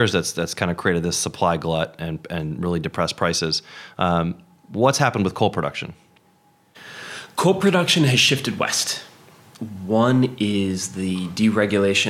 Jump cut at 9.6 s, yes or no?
yes